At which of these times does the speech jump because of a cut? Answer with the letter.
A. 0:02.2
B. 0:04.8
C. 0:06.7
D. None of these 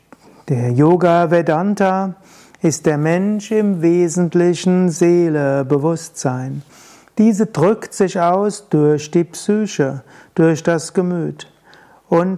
D